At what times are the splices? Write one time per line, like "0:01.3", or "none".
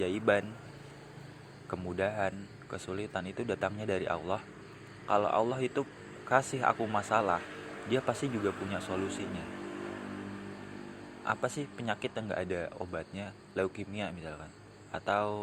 none